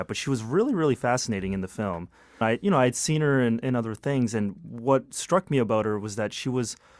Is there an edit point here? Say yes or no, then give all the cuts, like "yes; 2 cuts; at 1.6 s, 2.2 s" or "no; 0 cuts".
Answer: yes; 1 cut; at 2.4 s